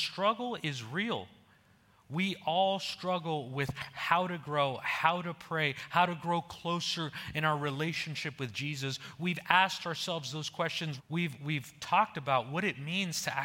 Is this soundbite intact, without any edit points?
no; 1 cut; at 11.0 s

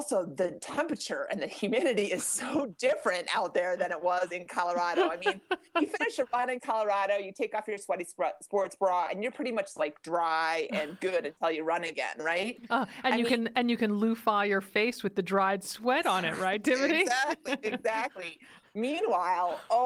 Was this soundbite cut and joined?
no; 0 cuts

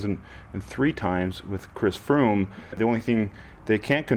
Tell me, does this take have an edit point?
yes; 1 cut; at 2.7 s

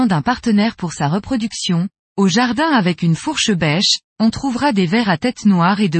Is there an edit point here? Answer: yes; 1 cut; at 2.0 s

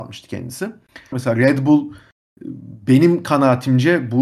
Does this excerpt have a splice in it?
yes; 1 cut; at 1.1 s

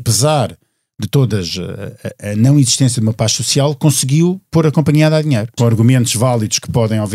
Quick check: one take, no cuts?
no; 1 cut; at 5.6 s

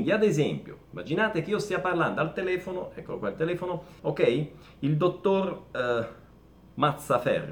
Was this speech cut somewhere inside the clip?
yes; 1 cut; at 4.0 s

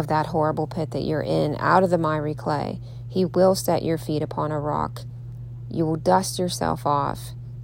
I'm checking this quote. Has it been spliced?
no; 0 cuts

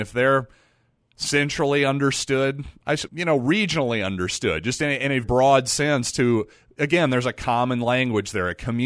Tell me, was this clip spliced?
yes; 2 cuts; at 3.1 s, 5.2 s

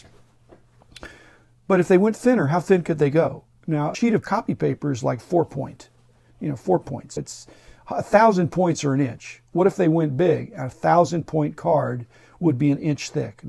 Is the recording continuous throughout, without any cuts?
yes; 0 cuts

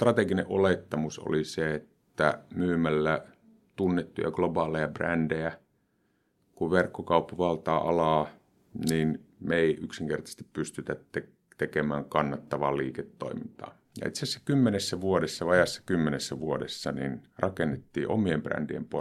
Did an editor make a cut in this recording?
yes; 1 cut; at 13.8 s

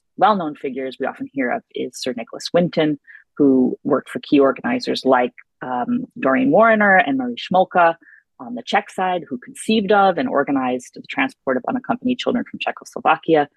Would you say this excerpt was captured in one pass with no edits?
yes; 0 cuts

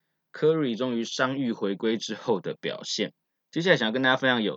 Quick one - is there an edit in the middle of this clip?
no; 0 cuts

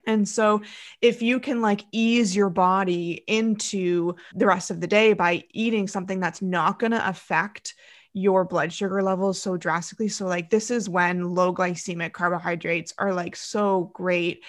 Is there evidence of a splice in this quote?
yes; 1 cut; at 4.3 s

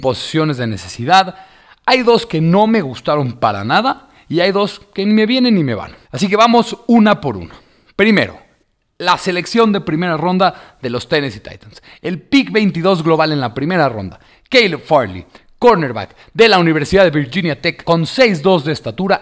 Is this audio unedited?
no; 2 cuts; at 6.0 s, 17.8 s

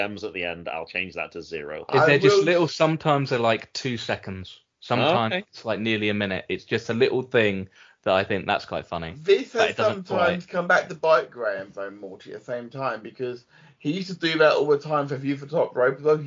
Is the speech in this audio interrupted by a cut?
no; 0 cuts

